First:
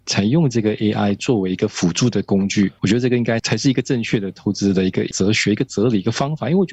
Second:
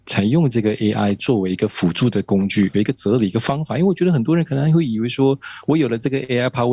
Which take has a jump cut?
second; 1 cut; at 2.7 s

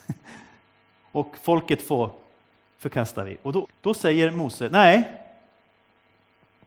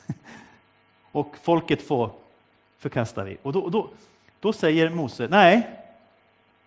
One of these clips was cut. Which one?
first; 1 cut; at 3.6 s

